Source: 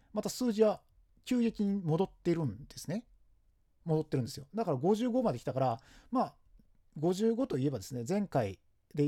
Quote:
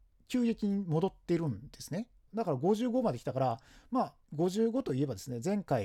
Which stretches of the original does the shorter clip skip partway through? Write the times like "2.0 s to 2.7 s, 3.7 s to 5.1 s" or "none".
3.2 s to 4.5 s, 6.4 s to 6.9 s